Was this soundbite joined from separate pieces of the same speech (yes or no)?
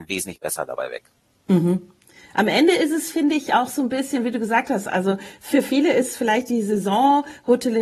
no